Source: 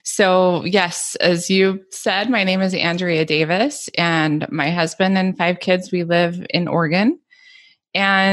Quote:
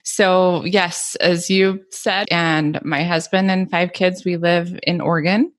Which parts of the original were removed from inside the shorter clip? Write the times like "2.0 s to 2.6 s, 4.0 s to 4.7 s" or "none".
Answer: 2.2 s to 3.9 s